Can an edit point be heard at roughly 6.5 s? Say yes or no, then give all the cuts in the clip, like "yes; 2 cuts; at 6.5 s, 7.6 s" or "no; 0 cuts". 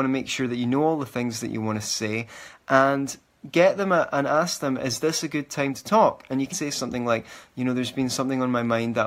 yes; 1 cut; at 6.5 s